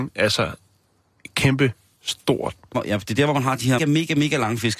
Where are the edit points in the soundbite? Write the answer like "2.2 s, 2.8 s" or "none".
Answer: 2.7 s, 3.8 s